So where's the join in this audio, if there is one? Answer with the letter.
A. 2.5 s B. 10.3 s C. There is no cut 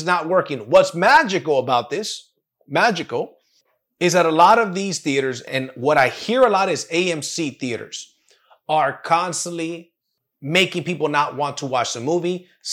C